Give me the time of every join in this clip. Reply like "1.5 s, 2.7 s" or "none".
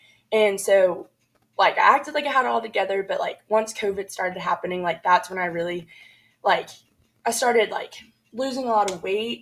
none